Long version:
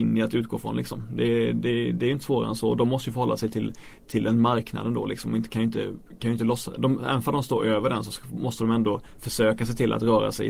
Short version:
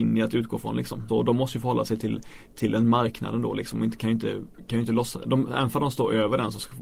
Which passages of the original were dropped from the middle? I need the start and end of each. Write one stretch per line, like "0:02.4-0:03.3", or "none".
0:01.1-0:02.6

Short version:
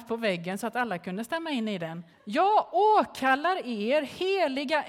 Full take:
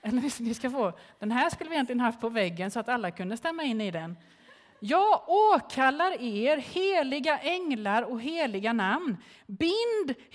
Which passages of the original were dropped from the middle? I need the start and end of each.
0:04.3-0:04.7

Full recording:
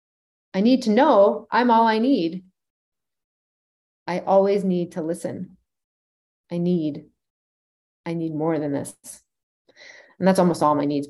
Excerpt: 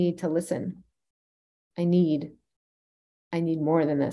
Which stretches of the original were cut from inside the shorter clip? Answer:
none

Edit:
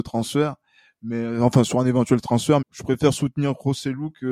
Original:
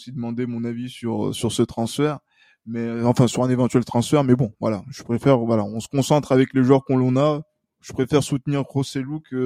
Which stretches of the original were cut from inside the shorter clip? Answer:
0:04.2-0:07.7

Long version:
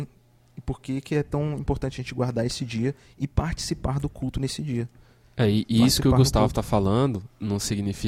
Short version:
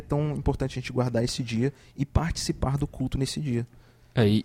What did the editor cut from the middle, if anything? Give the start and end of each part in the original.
none

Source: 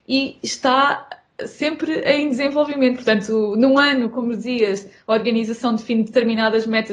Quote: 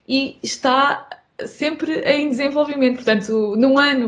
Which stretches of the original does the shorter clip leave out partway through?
none

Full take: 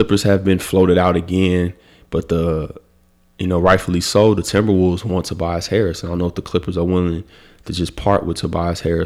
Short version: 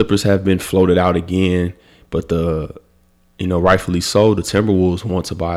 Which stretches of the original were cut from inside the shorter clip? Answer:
none

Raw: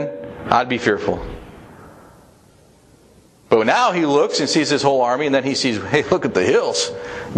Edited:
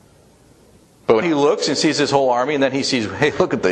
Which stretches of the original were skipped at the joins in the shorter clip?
0:03.6-0:03.9

